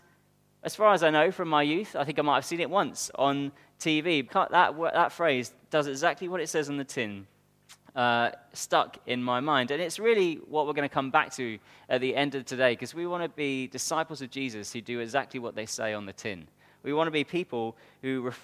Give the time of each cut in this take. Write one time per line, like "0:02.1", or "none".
0:04.3

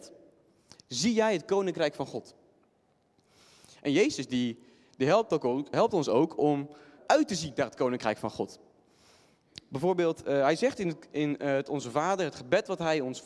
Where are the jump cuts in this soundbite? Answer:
0:05.7
0:07.0

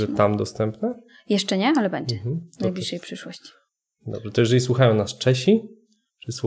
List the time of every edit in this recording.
none

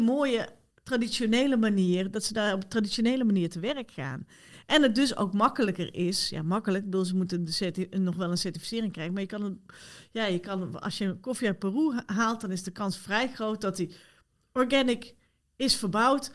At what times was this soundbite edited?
none

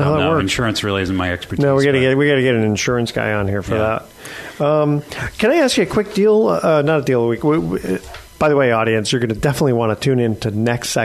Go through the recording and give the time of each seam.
none

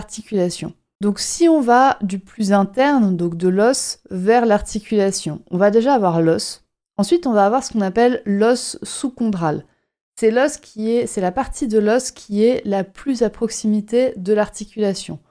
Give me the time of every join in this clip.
none

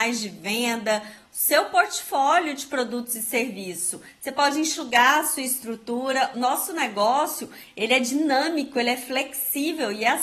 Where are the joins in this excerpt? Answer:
0:06.3

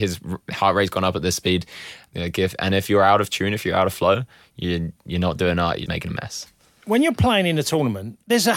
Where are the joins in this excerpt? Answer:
0:02.1
0:05.9

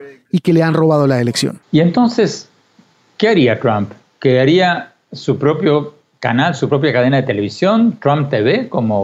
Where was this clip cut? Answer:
0:01.6

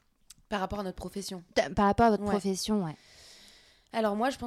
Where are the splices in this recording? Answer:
none

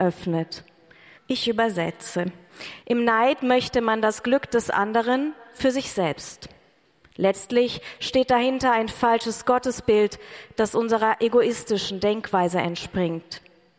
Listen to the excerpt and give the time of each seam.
0:01.2
0:02.8

